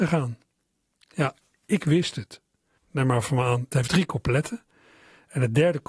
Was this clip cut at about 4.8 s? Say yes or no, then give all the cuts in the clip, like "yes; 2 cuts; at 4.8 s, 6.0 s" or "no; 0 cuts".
no; 1 cut; at 2.8 s